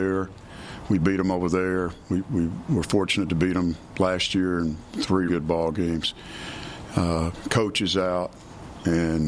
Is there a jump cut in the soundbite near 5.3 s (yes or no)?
yes